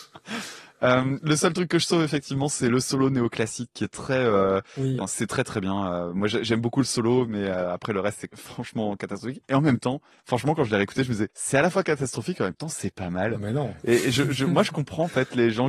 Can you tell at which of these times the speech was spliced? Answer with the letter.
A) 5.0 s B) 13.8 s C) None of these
A